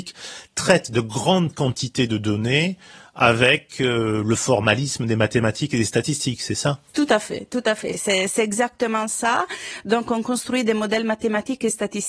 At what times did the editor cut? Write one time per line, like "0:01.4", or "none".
none